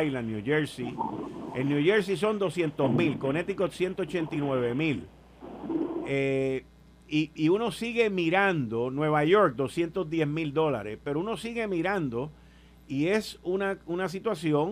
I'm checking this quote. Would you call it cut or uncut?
uncut